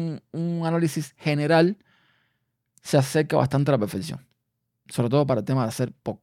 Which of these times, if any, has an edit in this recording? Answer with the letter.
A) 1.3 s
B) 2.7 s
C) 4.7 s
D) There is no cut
D